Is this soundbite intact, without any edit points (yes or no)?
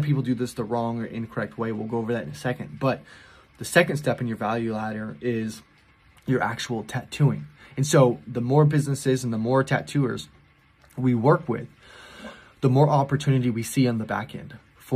yes